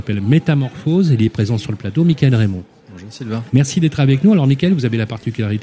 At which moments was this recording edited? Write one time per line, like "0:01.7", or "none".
0:03.5